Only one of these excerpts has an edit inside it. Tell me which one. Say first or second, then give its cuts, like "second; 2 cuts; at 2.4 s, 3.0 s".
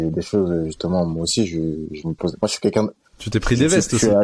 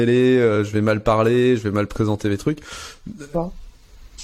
second; 1 cut; at 3.3 s